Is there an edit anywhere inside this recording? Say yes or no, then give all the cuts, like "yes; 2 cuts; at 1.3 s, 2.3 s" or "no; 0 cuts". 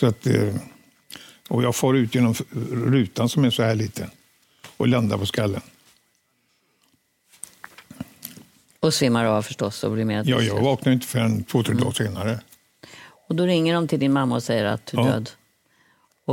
no; 0 cuts